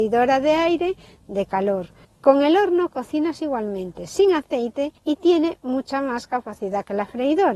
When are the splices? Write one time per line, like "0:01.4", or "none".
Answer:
0:02.0
0:05.0